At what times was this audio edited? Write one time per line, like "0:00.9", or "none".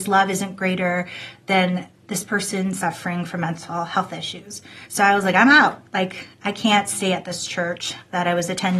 none